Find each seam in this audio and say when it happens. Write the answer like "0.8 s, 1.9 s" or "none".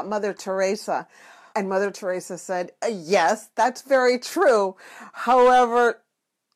1.5 s